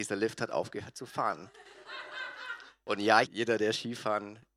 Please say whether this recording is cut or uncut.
cut